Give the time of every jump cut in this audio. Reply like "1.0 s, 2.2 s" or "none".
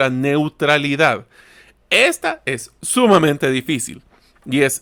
none